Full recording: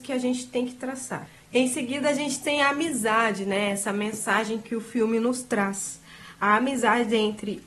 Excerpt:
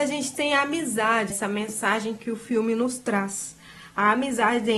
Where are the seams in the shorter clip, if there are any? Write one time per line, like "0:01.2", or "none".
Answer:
0:01.3